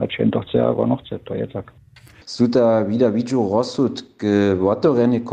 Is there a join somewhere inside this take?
yes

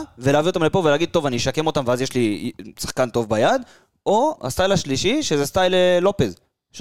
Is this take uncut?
yes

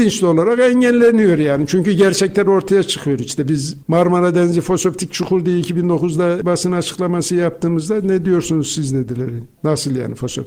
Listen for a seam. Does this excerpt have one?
no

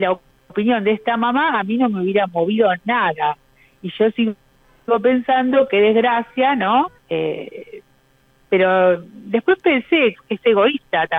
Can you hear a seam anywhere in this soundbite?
yes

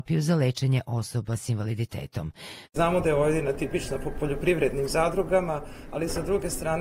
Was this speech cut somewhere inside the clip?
yes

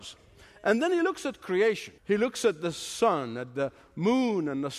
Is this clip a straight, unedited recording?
no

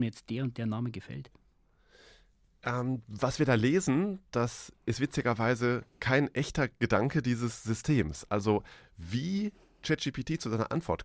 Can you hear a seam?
no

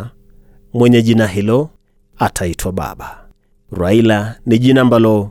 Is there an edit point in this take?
no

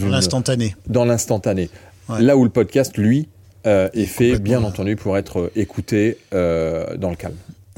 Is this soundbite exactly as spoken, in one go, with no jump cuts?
yes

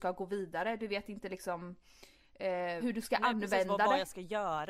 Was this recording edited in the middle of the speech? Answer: yes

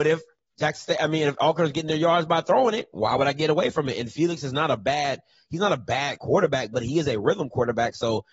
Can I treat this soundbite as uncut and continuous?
yes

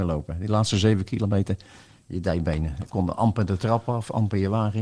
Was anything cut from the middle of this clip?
no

